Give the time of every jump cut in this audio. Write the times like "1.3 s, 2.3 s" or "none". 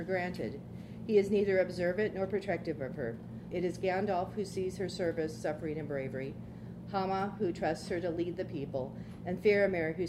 3.5 s